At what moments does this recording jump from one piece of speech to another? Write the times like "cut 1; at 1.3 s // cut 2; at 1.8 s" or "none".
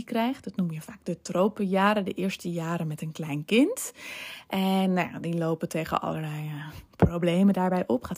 none